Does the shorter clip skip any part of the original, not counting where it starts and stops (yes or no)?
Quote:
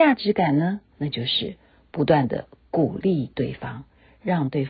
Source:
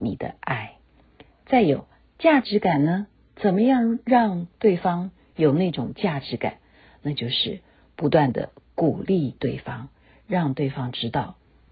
yes